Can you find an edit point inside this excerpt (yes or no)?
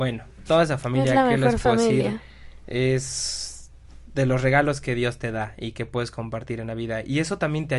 no